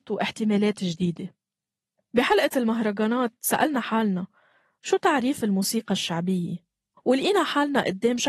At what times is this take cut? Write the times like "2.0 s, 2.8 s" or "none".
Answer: 7.0 s